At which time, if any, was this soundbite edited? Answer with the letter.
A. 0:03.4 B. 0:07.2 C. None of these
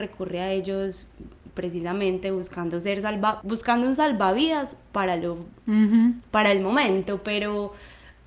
A